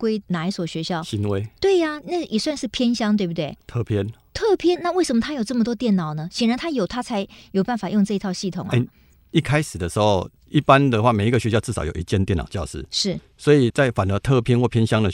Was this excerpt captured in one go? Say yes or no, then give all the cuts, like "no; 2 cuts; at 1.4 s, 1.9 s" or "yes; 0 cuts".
yes; 0 cuts